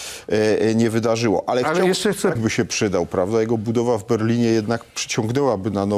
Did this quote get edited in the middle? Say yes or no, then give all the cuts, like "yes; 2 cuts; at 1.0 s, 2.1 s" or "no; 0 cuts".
yes; 1 cut; at 2.4 s